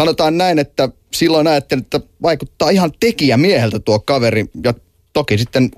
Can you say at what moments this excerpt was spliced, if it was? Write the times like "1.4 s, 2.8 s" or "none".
none